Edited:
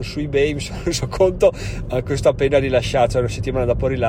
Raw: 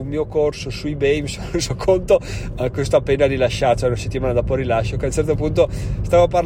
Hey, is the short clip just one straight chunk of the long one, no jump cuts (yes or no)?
yes